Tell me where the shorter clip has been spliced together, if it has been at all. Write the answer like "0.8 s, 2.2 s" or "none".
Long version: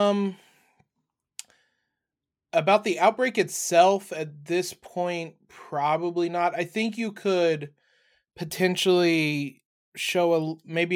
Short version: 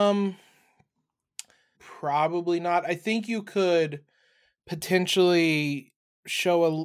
1.8 s